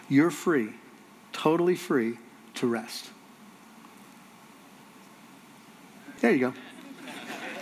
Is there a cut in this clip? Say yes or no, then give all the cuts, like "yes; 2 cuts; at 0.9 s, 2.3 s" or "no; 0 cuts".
yes; 1 cut; at 6.2 s